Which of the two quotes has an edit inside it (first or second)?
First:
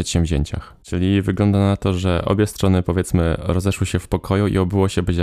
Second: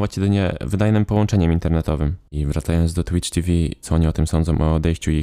second